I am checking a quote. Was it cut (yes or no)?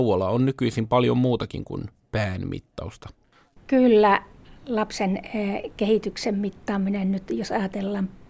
no